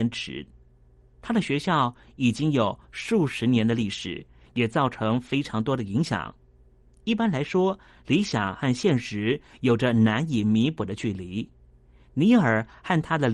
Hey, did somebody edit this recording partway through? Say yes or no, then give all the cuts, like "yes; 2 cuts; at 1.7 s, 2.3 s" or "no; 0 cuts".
no; 0 cuts